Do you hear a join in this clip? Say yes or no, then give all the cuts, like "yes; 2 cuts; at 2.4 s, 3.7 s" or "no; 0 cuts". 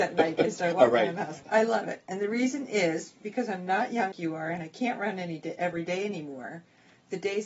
yes; 2 cuts; at 1.4 s, 4.1 s